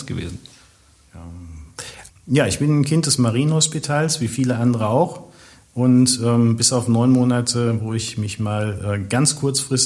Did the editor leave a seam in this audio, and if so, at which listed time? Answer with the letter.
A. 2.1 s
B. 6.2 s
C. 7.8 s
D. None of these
A